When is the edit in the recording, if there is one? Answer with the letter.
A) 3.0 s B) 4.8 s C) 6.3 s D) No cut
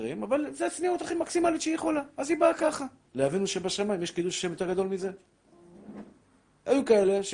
A